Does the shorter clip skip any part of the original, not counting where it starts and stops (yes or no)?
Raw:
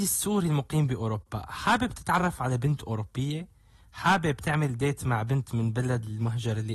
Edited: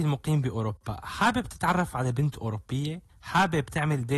yes